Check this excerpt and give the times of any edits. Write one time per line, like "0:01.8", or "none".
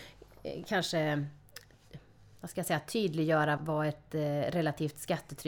0:03.6